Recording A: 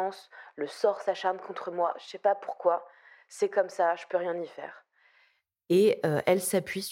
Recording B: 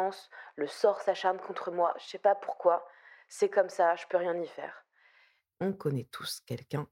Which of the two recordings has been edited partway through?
B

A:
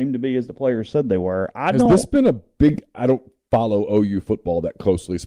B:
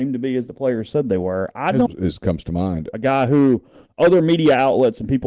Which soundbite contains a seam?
B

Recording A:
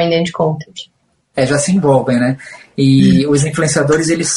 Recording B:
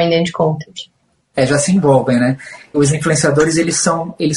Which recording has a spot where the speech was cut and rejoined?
B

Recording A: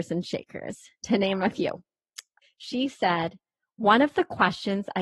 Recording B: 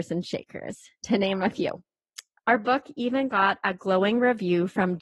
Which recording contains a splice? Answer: A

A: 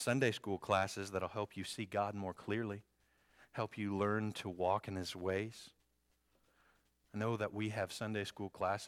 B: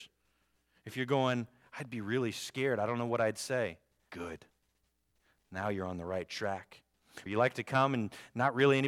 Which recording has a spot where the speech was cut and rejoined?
B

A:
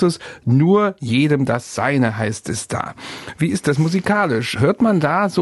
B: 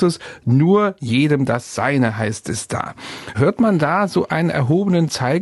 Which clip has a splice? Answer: B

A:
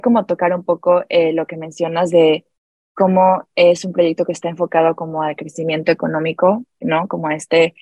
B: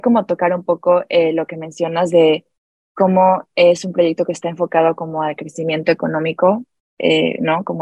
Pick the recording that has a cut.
A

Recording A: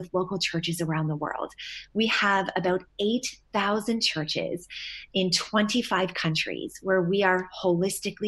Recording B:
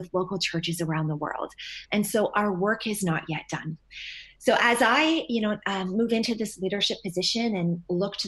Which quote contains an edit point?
B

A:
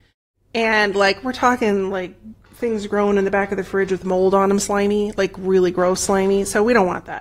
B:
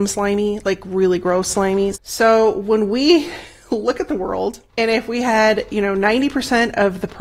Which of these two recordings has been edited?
B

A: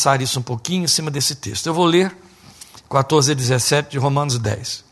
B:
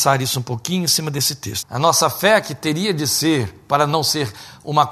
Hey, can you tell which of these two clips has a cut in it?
B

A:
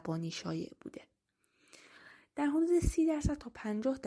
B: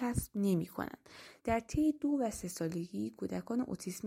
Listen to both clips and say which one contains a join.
B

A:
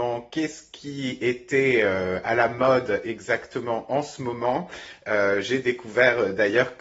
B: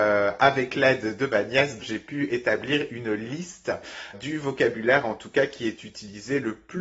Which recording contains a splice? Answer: B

